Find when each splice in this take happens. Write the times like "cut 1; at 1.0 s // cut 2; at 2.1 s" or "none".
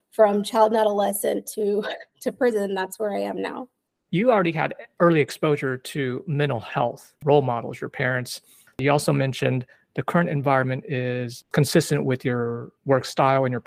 none